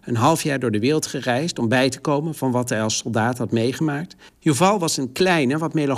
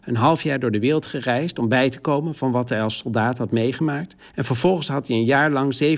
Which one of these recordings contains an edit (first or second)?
first